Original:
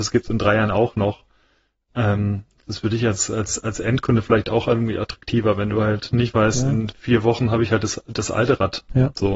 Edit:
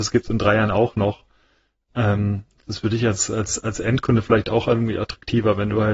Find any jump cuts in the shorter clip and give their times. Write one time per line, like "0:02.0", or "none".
none

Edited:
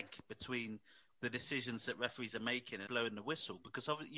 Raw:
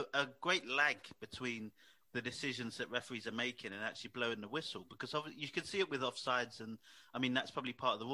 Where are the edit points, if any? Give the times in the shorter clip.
0:02.9

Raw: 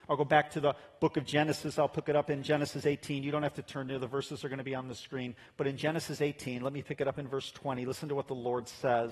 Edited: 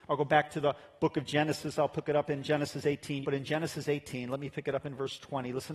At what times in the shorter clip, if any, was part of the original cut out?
0:03.2

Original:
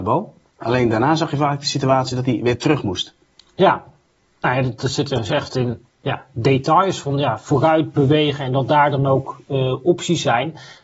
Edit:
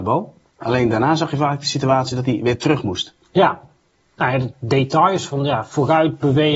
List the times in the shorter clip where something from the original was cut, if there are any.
0:03.2
0:04.5

